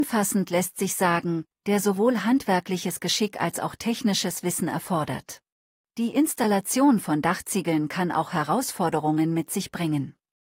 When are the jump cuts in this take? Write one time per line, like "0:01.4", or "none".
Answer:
0:01.6
0:05.8